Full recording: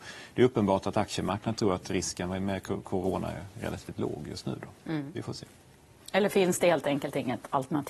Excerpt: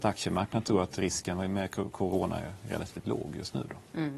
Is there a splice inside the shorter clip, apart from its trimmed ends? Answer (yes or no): no